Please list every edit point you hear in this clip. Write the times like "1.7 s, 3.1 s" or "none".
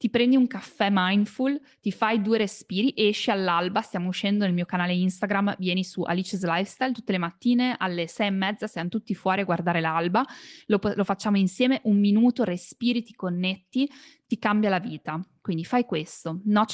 none